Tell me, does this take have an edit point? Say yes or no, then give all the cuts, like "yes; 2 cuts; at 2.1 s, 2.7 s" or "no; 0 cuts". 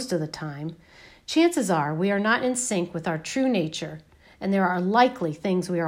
no; 0 cuts